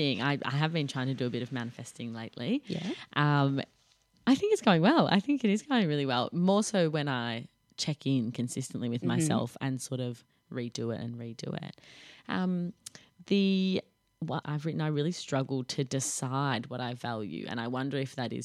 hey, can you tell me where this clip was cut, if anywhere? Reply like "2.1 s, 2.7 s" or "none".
14.4 s